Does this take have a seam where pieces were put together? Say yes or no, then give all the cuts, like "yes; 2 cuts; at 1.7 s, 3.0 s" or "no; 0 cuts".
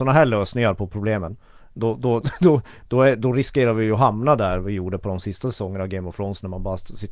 yes; 1 cut; at 2.2 s